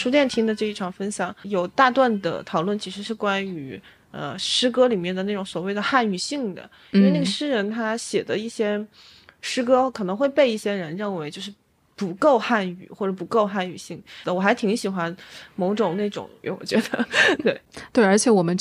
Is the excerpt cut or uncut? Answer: cut